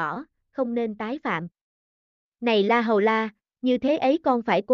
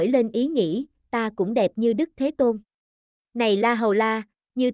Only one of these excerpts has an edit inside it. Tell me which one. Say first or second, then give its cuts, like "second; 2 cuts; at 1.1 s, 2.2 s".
second; 1 cut; at 3.1 s